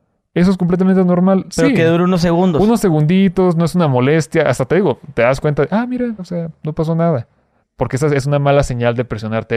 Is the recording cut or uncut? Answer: cut